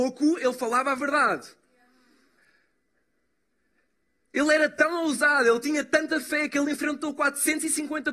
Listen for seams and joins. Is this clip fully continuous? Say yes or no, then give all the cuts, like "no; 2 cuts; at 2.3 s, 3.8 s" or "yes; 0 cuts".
yes; 0 cuts